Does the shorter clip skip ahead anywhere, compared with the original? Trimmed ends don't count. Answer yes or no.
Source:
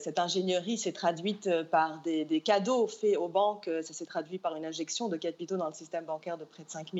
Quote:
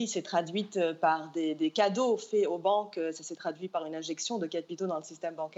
no